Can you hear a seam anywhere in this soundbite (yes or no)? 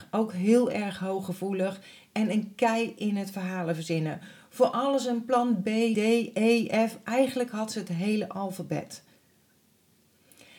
yes